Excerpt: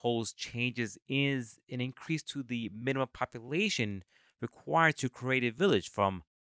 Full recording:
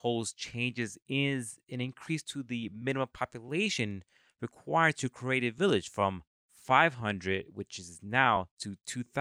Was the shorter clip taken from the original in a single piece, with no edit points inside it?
yes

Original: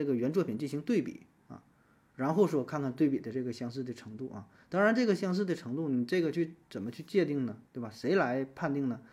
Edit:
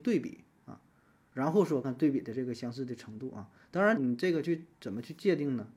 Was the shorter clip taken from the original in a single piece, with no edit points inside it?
no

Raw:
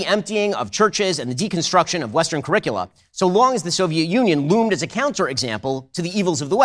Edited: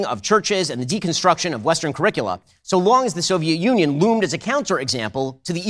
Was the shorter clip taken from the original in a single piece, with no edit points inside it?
yes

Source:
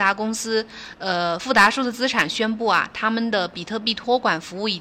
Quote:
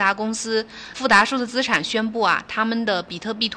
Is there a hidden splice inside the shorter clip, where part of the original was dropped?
yes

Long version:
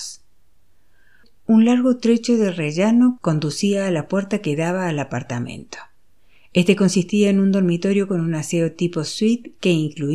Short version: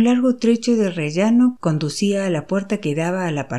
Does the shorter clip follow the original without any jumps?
yes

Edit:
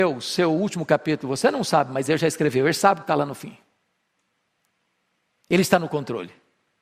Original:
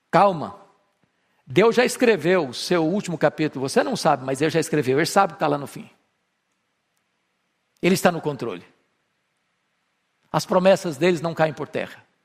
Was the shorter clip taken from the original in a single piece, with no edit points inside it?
yes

